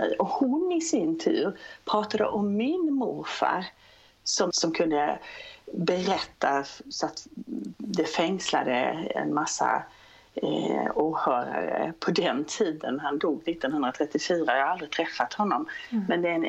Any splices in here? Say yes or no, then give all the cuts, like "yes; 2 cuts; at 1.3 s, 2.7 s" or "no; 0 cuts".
yes; 1 cut; at 4.5 s